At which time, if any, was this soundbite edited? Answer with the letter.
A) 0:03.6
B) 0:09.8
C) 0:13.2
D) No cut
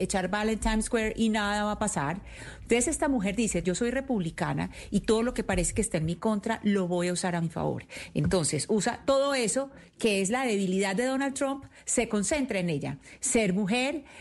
A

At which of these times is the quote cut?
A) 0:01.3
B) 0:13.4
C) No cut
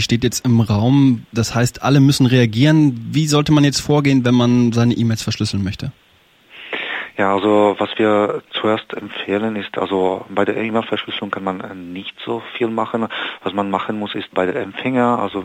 C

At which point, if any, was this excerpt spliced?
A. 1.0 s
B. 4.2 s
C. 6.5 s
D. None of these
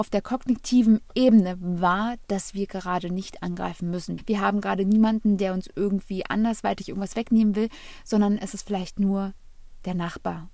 B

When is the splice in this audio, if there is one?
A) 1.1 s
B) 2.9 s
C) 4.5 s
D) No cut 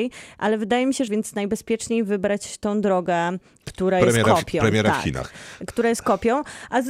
A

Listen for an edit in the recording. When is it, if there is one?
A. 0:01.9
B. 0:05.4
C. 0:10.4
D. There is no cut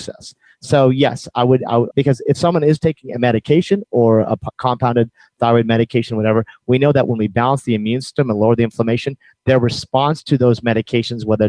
A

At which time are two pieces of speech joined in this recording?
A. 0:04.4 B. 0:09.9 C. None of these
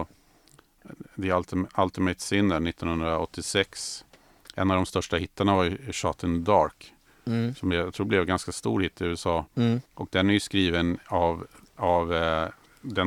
B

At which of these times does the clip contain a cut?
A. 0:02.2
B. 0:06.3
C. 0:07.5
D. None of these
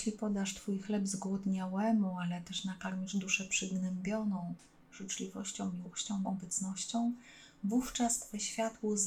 B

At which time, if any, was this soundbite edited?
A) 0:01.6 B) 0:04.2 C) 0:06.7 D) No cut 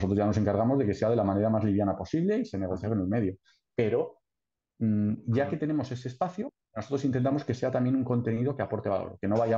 D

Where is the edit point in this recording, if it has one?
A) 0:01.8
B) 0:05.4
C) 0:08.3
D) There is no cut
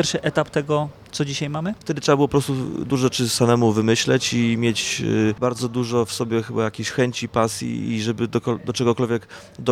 A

